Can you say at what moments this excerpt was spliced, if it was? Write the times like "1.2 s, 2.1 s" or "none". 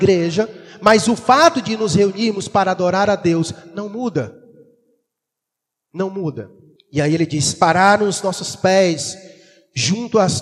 6.8 s